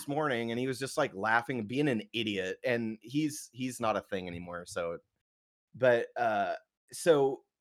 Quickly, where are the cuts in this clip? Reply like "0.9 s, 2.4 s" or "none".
none